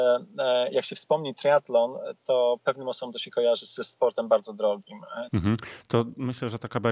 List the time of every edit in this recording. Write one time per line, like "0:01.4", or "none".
0:05.3